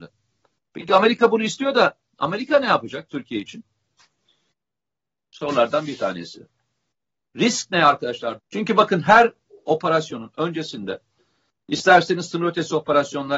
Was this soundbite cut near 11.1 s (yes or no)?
no